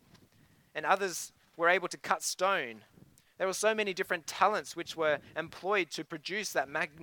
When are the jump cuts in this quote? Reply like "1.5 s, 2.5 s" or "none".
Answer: none